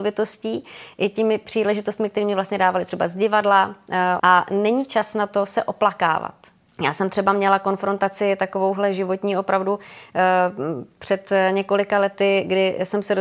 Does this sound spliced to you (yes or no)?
yes